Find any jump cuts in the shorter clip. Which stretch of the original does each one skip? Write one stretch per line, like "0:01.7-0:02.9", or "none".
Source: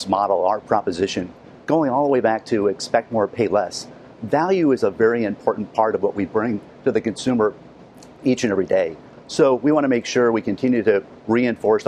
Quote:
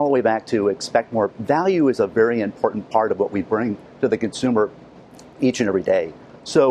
0:03.3-0:04.1

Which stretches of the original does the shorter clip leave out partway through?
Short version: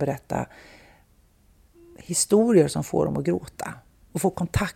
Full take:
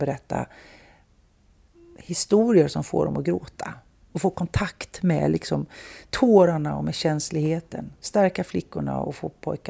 none

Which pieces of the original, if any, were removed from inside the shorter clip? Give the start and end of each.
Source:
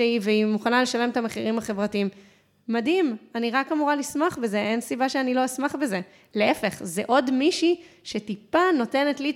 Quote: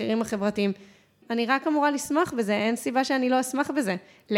0:02.6-0:03.3

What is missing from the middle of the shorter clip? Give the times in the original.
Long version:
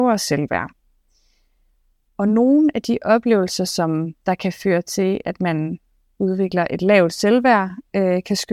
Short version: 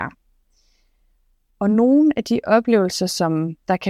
none

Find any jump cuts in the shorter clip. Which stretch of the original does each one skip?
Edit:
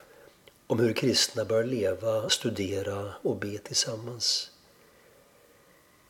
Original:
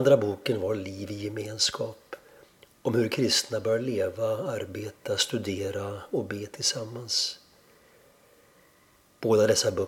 0:04.4-0:05.2

